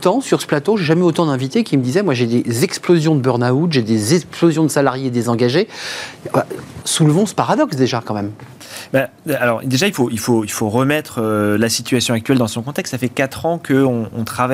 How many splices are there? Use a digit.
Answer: 1